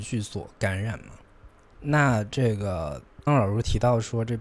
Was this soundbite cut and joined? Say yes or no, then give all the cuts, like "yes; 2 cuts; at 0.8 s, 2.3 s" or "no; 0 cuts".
yes; 2 cuts; at 1.7 s, 3.3 s